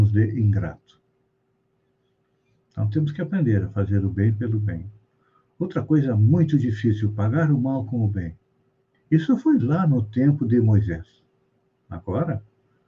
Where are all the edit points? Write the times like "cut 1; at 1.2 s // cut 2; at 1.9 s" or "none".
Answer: cut 1; at 8.9 s